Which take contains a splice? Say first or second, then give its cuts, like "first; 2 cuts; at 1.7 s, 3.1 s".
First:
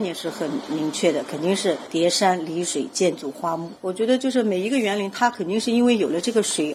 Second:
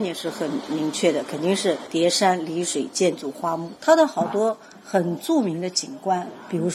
second; 1 cut; at 3.8 s